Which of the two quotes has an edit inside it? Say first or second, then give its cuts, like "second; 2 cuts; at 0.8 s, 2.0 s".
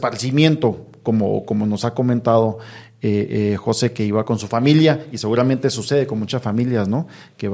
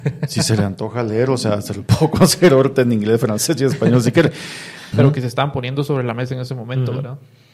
second; 1 cut; at 4.9 s